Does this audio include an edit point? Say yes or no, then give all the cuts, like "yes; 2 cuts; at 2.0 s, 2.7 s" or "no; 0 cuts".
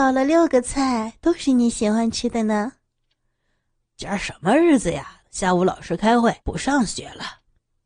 yes; 2 cuts; at 5.2 s, 6.4 s